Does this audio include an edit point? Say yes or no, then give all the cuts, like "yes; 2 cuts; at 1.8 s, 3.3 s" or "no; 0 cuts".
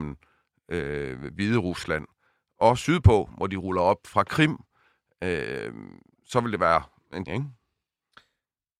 yes; 1 cut; at 7.3 s